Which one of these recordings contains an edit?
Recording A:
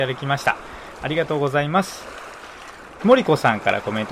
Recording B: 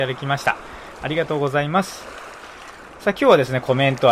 A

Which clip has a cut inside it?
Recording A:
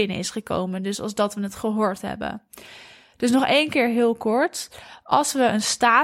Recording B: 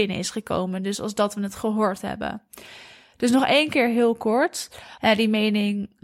B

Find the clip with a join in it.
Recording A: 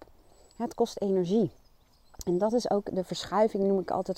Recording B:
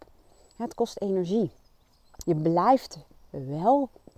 B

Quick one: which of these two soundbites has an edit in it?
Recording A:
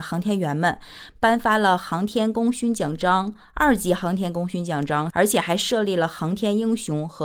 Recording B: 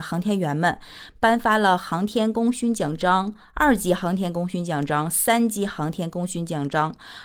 A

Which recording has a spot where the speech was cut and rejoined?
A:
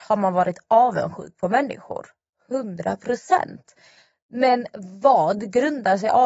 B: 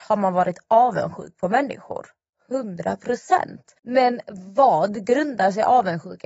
B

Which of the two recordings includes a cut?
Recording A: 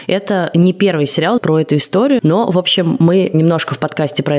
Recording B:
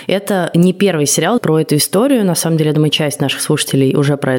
A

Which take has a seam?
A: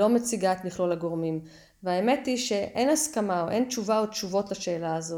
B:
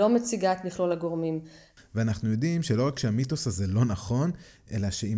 B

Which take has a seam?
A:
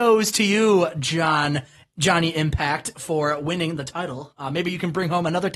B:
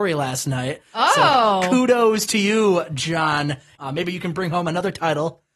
B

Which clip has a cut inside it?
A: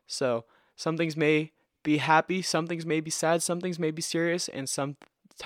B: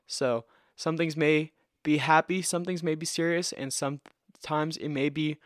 B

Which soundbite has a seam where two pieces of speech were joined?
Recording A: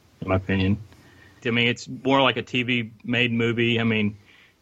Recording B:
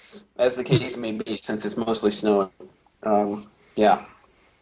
A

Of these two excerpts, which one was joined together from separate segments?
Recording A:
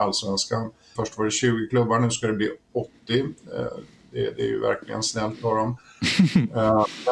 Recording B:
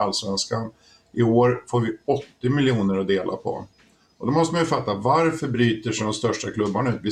A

